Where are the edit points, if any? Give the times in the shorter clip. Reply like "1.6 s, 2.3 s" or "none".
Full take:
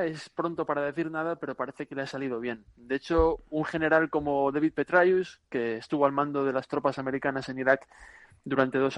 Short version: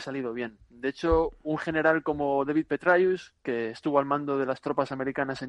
none